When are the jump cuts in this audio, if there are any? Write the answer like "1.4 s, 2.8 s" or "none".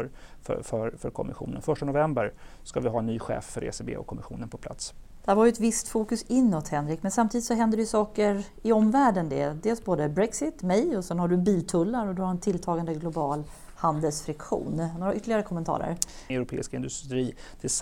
5.2 s, 16.3 s